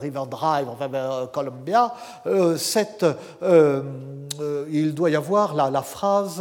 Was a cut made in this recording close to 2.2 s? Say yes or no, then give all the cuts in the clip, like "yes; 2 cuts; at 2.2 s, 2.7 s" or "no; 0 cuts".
no; 0 cuts